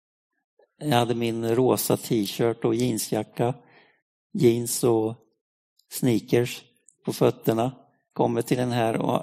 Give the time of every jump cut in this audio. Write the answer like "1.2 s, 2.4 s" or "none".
none